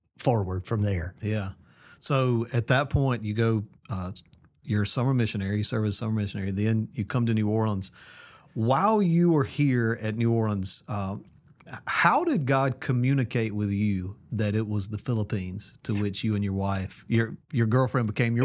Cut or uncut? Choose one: uncut